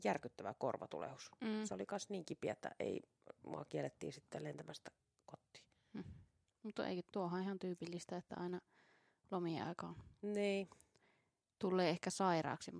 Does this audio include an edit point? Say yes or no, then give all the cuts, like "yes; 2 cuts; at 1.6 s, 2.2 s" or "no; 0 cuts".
no; 0 cuts